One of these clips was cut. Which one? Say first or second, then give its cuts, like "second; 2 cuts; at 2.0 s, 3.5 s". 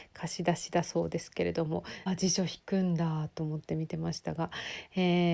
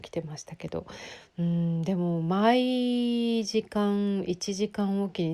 first; 1 cut; at 2.1 s